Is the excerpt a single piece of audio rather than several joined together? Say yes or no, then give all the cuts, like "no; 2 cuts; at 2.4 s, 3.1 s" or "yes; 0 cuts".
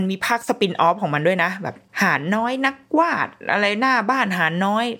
no; 1 cut; at 1.9 s